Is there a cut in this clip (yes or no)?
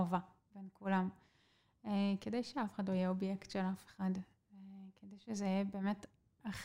no